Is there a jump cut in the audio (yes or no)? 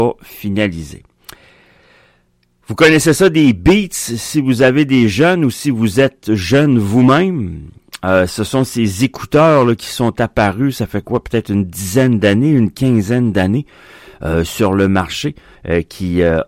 yes